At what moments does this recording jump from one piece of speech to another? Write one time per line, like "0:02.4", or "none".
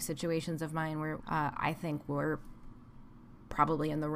0:01.2

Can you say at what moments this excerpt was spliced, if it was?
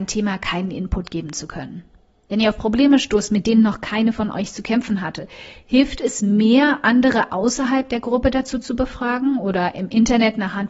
none

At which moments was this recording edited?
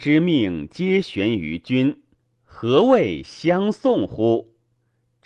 none

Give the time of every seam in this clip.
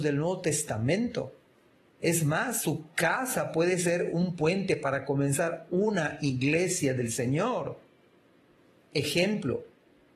none

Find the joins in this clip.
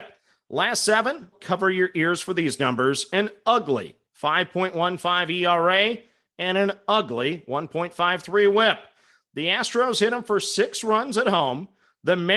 0:01.3

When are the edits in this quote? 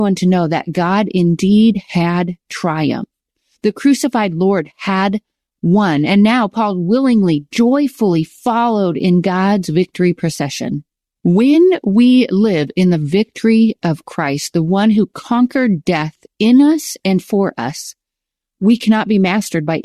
none

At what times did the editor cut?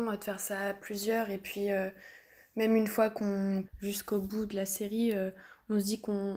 0:03.6

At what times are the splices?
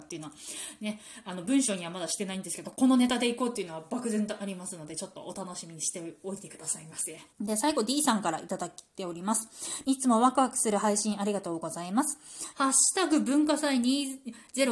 0:07.3
0:09.8
0:12.5

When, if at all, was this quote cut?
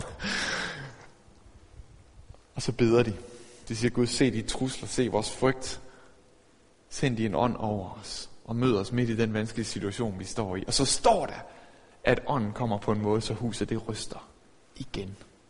none

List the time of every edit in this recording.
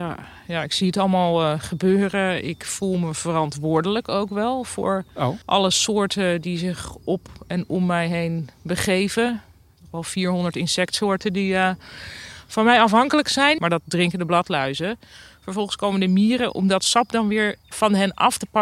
0:05.4
0:13.6

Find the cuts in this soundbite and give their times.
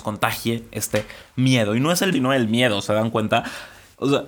0:02.1

